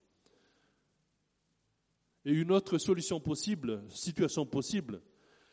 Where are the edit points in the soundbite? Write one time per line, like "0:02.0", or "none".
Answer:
none